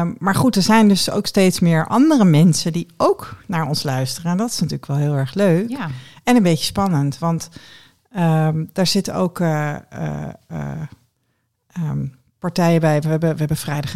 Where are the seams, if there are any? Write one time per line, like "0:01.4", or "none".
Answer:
none